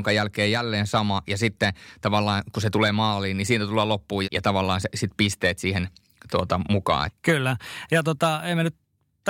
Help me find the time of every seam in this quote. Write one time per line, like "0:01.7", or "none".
0:04.2
0:07.1